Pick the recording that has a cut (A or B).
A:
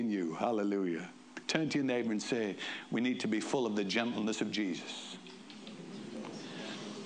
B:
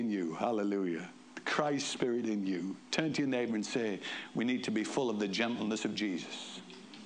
A